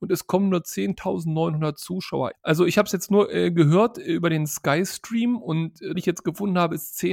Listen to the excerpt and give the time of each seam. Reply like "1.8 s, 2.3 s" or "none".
2.3 s, 6.0 s